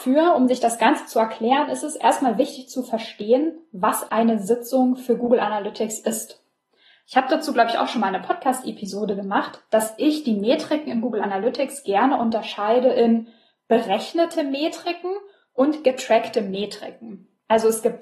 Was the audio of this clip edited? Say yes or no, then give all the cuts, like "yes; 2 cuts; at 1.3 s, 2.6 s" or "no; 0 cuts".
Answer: yes; 1 cut; at 4.1 s